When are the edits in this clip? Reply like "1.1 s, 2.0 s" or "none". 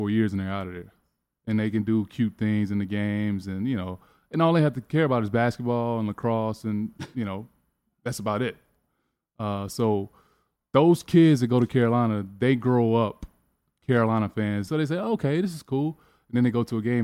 14.7 s